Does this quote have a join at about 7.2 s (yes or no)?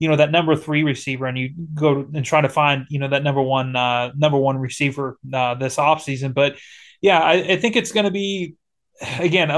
no